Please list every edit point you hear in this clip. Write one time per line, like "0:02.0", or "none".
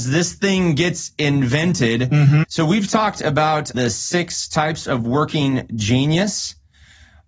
0:02.4
0:03.7